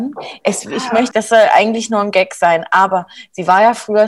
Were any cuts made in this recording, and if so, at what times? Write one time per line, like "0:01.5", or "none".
0:01.1